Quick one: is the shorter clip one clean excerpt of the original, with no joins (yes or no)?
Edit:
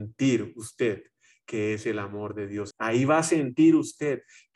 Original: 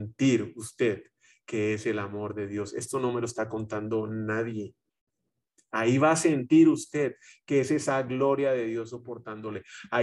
no